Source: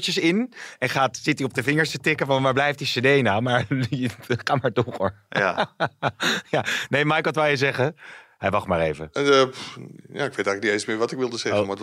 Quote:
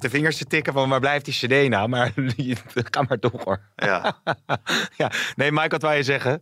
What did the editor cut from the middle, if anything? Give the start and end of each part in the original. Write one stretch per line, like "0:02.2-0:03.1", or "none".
none